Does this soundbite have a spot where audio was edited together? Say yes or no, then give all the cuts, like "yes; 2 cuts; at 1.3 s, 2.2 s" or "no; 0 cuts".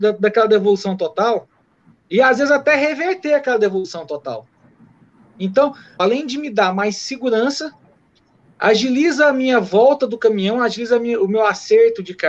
yes; 1 cut; at 6.0 s